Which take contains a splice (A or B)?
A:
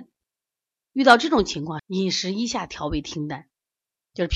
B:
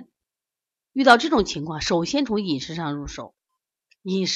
A